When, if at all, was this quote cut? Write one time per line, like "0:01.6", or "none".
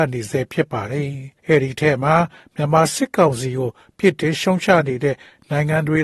0:01.4